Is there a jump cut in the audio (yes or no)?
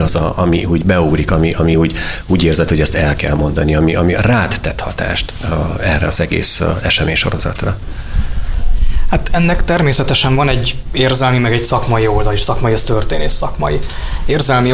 no